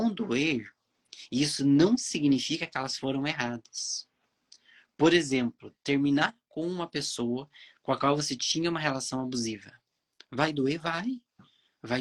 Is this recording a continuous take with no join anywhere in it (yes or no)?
yes